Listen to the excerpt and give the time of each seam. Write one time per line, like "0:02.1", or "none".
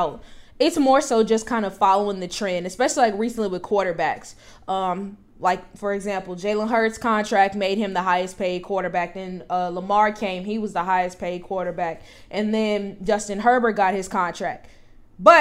none